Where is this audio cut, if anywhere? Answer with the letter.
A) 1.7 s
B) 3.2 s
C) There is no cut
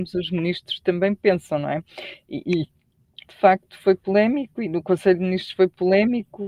B